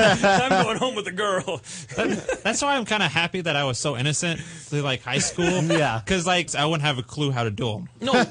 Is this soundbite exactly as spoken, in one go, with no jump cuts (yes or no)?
no